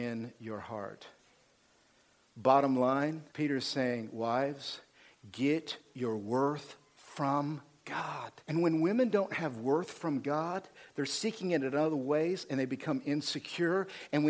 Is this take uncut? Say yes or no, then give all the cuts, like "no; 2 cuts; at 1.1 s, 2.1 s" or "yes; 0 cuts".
no; 2 cuts; at 3.3 s, 8.4 s